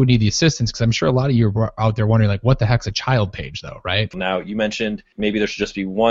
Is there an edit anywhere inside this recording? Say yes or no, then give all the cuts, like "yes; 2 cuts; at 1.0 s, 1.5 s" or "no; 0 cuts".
yes; 1 cut; at 4.1 s